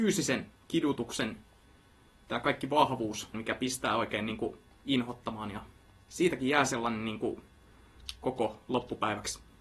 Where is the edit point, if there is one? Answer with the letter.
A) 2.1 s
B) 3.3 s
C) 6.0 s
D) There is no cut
B